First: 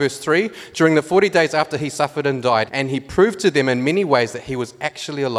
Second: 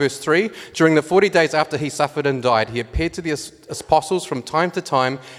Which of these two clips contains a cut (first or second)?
first